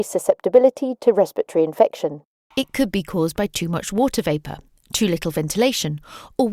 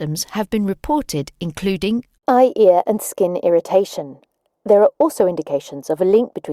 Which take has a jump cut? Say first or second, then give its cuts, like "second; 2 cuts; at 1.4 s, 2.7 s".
first; 1 cut; at 2.5 s